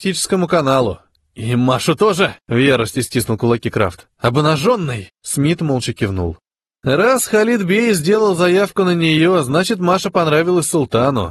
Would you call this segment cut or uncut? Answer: uncut